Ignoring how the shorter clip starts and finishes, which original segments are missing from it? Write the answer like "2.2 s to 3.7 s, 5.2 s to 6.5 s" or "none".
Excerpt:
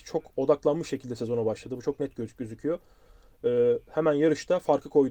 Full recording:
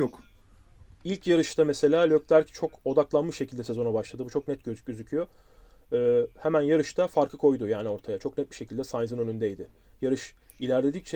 none